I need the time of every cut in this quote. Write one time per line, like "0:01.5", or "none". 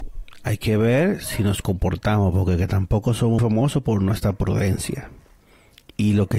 0:03.4